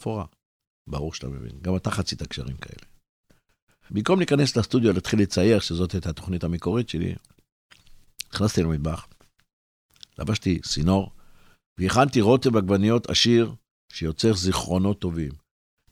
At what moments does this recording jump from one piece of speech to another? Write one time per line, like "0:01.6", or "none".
0:03.9